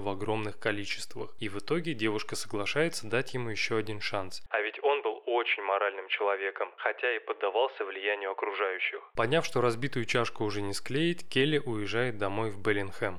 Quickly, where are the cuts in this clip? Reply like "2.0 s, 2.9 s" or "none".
4.5 s, 9.2 s